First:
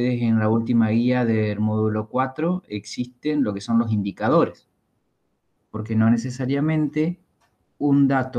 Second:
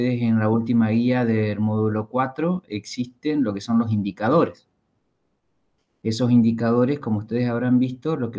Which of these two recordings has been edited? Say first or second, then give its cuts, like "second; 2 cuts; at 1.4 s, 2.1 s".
first; 1 cut; at 5.6 s